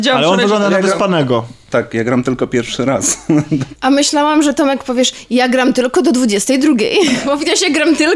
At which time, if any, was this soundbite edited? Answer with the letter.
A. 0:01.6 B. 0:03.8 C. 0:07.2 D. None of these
B